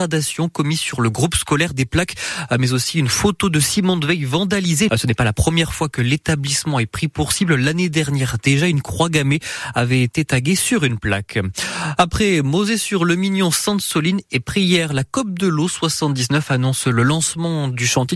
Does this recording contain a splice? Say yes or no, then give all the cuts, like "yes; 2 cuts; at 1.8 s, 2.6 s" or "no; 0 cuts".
yes; 1 cut; at 4.9 s